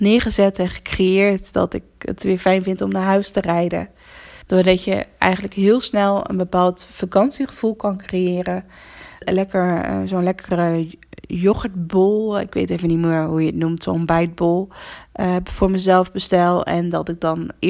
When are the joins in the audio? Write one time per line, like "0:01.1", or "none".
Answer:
0:04.4
0:09.2

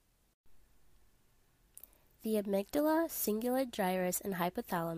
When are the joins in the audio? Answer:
none

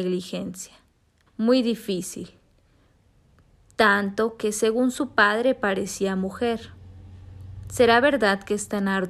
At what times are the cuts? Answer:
0:01.3

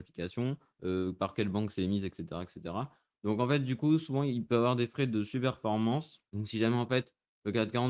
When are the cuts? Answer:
none

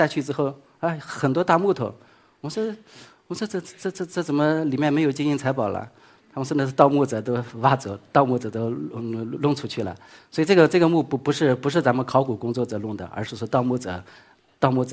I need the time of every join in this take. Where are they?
none

